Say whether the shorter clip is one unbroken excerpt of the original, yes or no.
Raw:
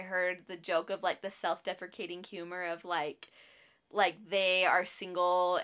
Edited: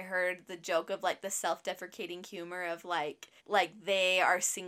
no